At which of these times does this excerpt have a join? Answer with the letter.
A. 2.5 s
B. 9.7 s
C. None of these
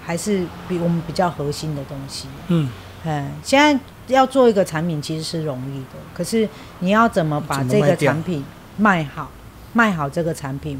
C